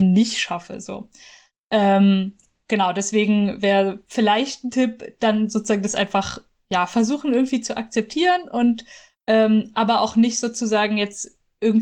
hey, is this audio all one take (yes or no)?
yes